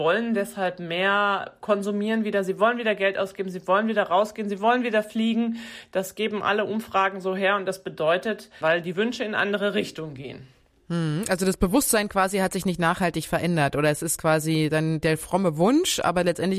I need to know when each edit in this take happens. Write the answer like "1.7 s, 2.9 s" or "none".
8.6 s